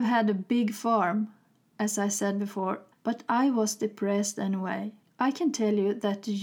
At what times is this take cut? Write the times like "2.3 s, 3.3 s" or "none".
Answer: 2.9 s, 5.0 s

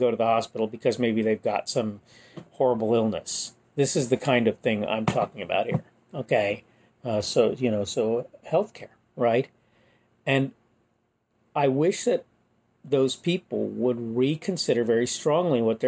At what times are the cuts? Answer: 6.9 s

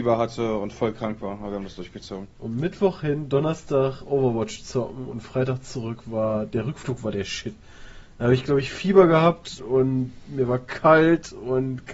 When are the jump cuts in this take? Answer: 2.3 s, 9.6 s

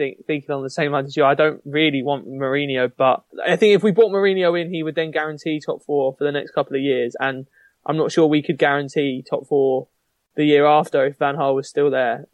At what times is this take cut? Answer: none

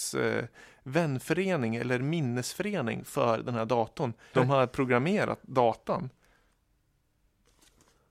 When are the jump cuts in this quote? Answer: 4.3 s

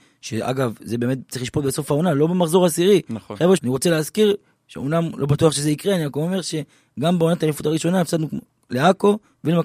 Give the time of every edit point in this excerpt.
3.6 s

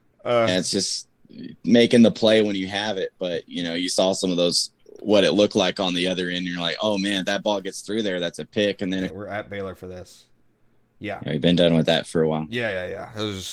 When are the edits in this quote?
9.1 s

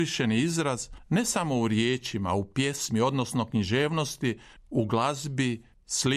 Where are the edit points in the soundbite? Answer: 4.6 s

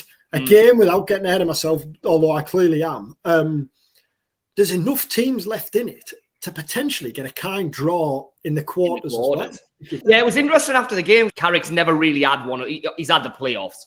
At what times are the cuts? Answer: 10.0 s, 11.3 s

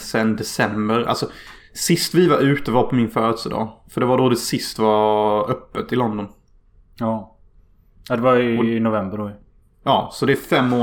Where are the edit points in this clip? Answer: none

